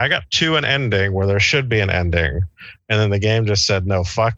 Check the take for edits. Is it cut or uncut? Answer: uncut